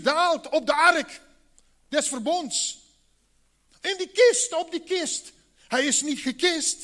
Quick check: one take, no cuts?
yes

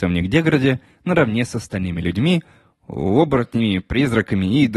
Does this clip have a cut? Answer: no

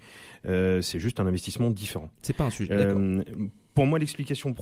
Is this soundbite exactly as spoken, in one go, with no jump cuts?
yes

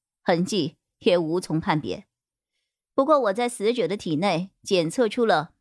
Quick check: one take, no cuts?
yes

